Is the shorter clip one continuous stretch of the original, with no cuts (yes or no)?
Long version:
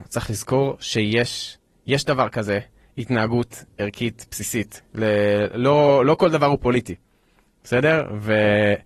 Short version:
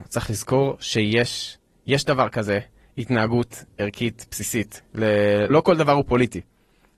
no